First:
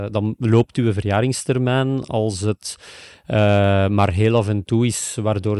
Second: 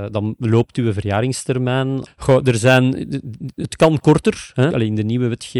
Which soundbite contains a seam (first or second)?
second